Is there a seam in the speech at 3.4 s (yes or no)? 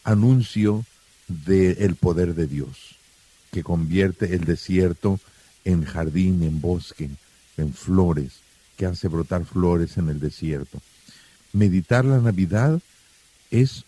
no